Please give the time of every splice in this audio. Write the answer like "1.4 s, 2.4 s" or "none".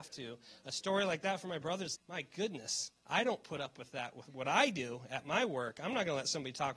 2.0 s